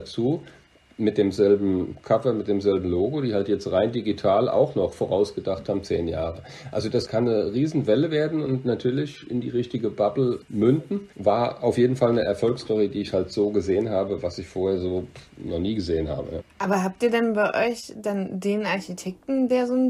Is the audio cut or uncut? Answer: cut